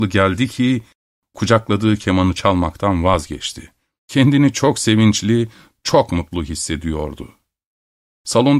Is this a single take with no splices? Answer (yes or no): no